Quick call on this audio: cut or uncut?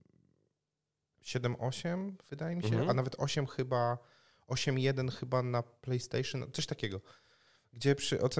uncut